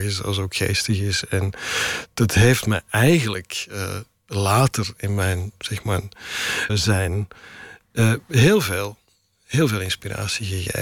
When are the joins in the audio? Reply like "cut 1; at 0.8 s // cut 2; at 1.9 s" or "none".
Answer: cut 1; at 6.7 s